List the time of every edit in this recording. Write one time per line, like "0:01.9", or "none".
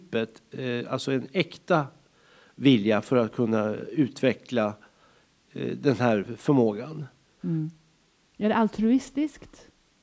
none

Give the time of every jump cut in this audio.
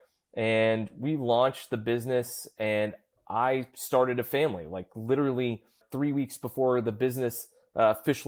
0:05.8

